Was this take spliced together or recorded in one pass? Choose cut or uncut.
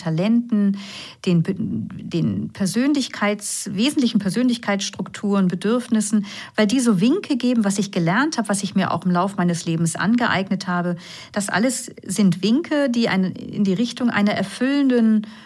uncut